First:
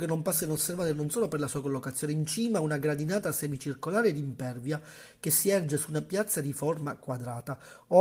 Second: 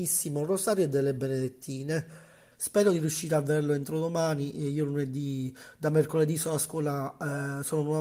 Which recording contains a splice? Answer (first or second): second